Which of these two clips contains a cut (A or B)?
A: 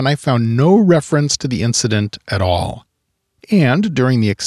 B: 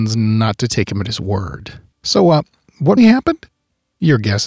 B